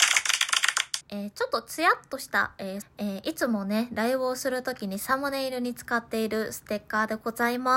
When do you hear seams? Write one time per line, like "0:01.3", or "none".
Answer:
0:01.0
0:02.8

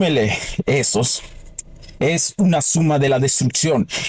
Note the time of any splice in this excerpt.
none

